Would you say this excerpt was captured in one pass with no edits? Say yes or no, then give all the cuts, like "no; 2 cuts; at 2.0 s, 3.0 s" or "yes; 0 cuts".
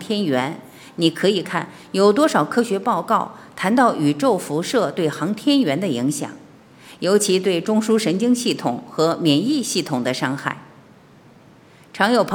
no; 1 cut; at 1.4 s